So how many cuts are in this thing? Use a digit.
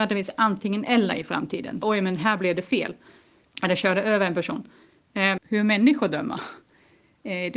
3